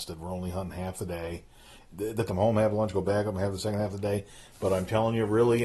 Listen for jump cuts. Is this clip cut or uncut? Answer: cut